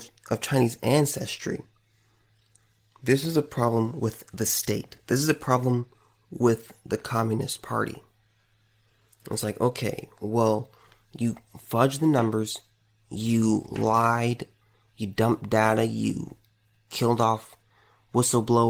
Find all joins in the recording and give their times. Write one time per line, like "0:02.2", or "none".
none